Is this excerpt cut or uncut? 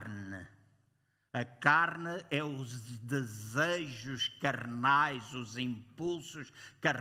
uncut